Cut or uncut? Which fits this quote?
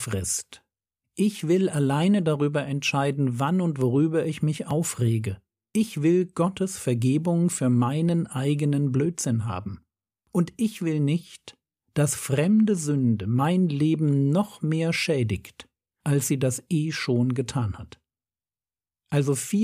uncut